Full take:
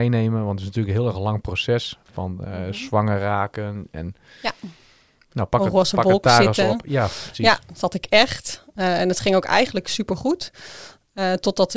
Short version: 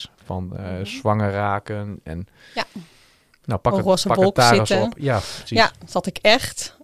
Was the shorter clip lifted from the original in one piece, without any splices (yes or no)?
yes